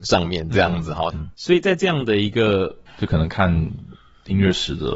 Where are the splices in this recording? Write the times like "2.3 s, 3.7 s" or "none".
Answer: 1.1 s, 2.9 s